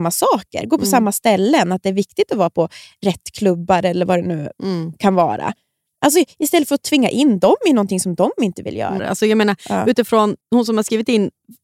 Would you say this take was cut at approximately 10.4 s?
yes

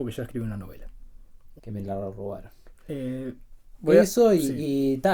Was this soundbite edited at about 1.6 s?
yes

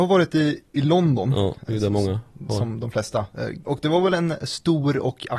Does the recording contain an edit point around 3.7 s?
yes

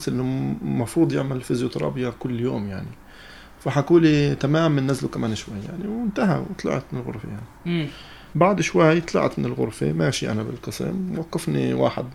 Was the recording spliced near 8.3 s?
yes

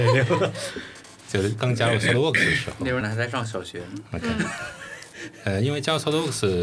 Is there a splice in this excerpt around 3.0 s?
yes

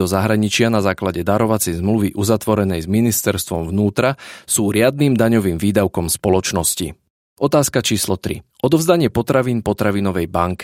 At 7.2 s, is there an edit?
no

